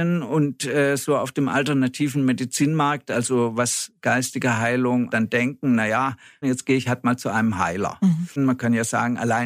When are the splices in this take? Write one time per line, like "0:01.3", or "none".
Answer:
0:05.1
0:06.4
0:08.4